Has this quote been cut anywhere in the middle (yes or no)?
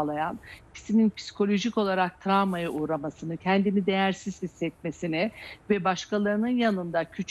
no